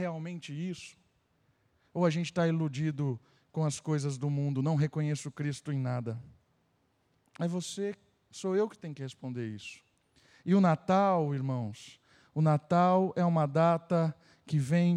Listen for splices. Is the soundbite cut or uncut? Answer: uncut